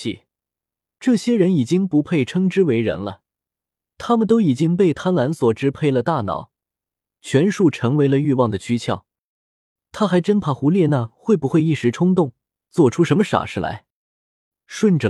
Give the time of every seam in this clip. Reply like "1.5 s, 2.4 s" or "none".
9.8 s